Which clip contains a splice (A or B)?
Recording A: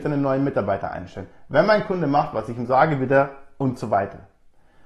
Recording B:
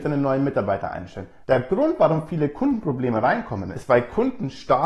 B